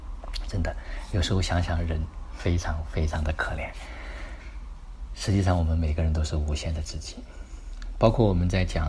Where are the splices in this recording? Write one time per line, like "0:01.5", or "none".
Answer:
none